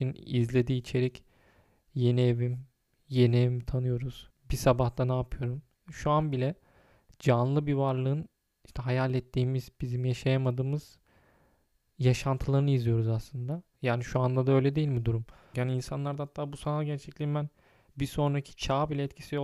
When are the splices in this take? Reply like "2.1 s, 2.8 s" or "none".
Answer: 4.3 s, 13.8 s, 15.5 s